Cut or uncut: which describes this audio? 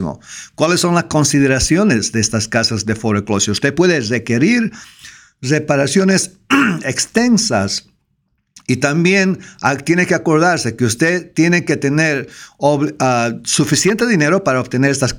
uncut